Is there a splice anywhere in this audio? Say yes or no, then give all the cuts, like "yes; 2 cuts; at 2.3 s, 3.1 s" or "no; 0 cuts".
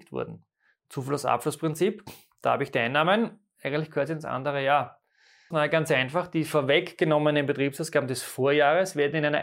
yes; 1 cut; at 5.5 s